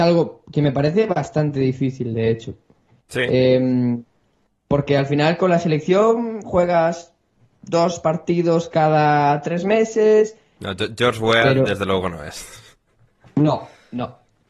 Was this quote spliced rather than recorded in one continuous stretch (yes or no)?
yes